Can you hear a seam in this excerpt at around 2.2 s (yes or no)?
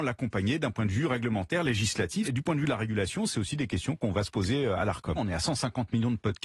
yes